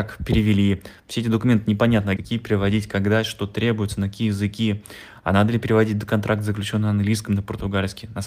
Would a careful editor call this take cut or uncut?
cut